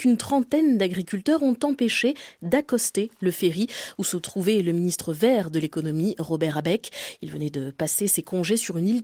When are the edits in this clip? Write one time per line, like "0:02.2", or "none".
none